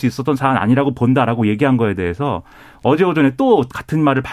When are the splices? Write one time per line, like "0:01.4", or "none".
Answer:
none

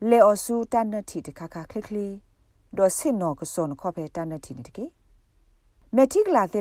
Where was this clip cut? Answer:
none

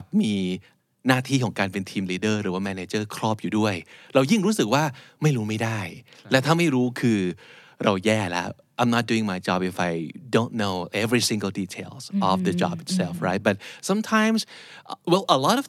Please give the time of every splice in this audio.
none

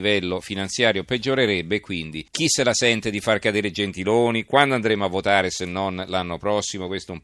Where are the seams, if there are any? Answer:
0:02.3

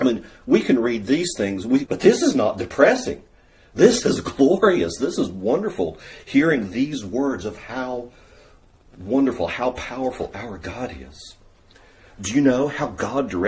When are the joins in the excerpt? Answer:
0:01.9

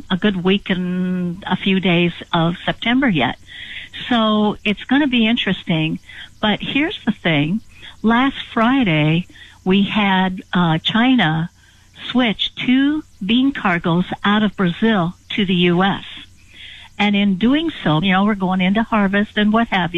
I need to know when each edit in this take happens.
0:18.0

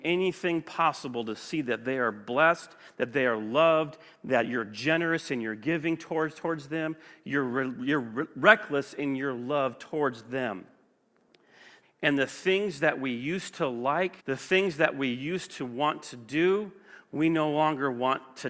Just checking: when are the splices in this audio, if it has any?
0:11.8
0:14.2

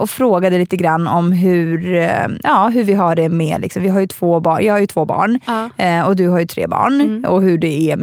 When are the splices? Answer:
none

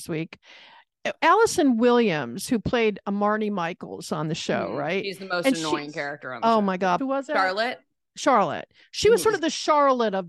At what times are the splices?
0:07.0

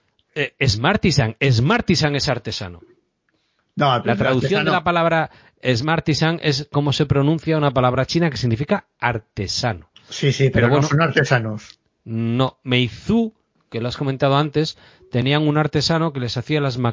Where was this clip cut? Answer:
none

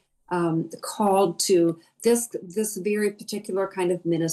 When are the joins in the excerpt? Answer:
none

